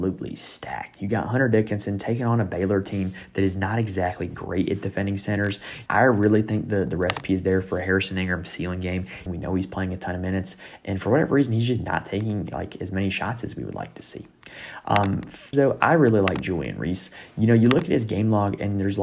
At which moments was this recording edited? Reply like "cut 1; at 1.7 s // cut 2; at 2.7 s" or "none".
cut 1; at 5.9 s // cut 2; at 9.3 s // cut 3; at 15.5 s